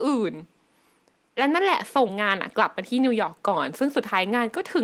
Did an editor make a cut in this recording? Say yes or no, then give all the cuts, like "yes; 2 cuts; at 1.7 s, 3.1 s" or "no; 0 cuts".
no; 0 cuts